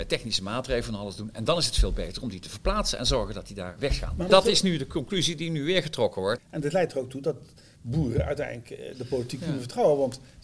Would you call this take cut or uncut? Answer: cut